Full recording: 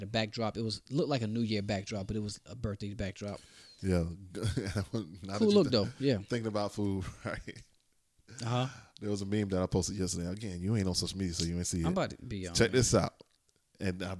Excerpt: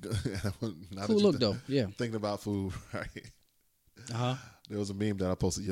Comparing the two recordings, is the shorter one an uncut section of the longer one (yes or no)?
yes